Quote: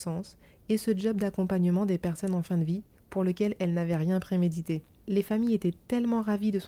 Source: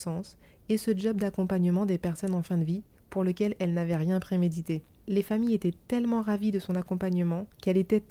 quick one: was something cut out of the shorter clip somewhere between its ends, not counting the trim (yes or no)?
no